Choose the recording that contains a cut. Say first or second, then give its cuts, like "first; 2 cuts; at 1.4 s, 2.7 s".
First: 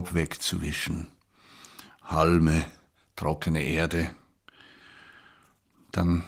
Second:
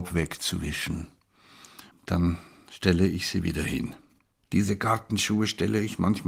second; 2 cuts; at 1.9 s, 4.4 s